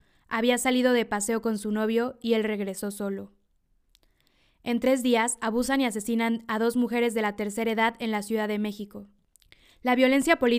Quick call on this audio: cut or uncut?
uncut